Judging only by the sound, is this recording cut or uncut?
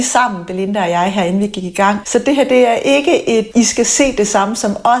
cut